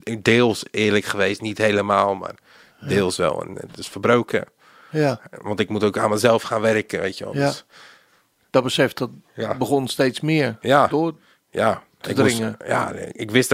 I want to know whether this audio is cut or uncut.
uncut